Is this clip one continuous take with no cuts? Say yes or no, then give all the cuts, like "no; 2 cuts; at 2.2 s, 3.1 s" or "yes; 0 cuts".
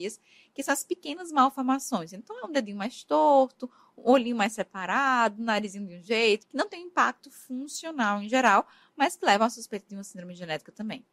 no; 1 cut; at 6.4 s